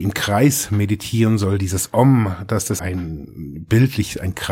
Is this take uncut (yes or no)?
no